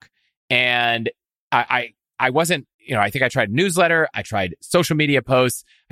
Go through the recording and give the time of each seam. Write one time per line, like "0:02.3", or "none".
0:02.7
0:04.1